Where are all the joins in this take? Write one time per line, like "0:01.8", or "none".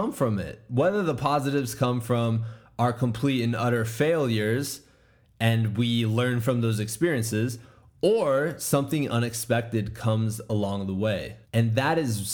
0:11.4